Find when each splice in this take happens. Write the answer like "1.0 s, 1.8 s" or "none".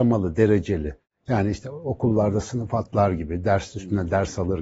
none